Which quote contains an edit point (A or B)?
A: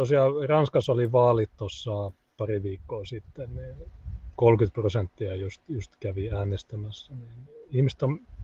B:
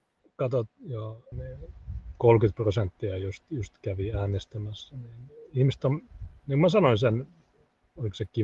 B